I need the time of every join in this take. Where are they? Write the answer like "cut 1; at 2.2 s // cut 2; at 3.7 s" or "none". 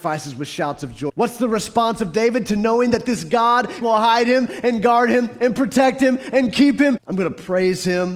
cut 1; at 1.1 s // cut 2; at 3.8 s // cut 3; at 7.0 s